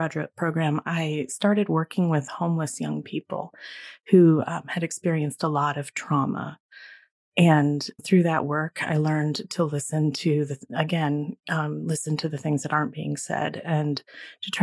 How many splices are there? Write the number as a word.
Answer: zero